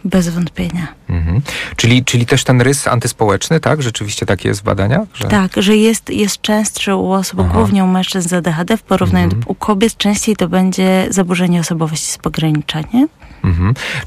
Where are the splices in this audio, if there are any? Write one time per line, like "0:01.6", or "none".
0:09.4